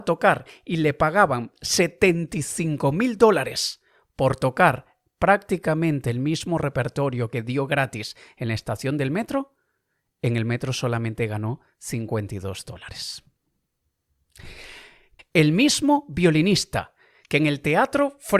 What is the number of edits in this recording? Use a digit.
1